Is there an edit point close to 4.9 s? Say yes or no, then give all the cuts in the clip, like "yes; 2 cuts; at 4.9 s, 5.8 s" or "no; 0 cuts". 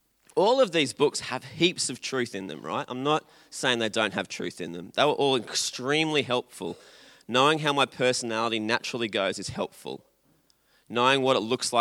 no; 0 cuts